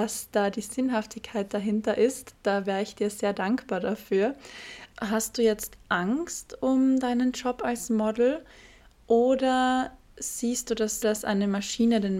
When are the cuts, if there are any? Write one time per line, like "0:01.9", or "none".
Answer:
0:04.9
0:11.0